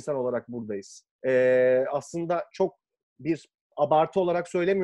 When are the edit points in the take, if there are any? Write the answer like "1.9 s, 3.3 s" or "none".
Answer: 1.1 s